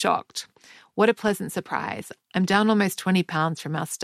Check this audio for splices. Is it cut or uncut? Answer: uncut